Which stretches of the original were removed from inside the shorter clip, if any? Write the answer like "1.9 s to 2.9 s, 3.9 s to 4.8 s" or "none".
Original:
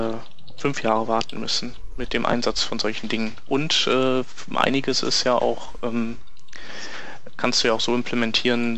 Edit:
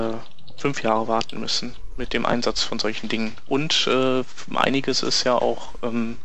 none